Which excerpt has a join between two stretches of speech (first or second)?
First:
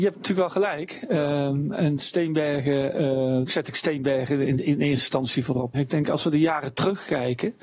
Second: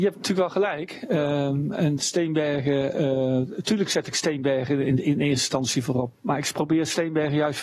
first